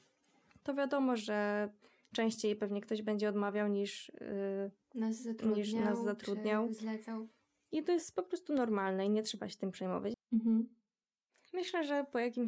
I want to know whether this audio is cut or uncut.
cut